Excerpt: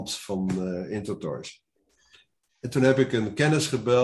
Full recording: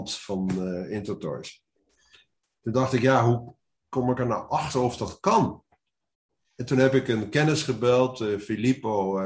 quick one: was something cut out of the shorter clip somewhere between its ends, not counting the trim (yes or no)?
yes